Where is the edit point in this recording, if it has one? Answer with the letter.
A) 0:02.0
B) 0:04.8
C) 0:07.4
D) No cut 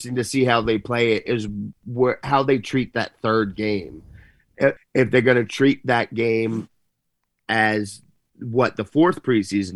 B